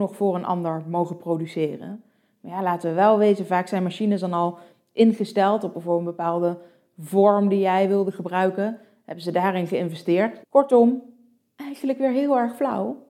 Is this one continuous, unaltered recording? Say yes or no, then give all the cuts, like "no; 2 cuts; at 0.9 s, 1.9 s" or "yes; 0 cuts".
no; 1 cut; at 10.4 s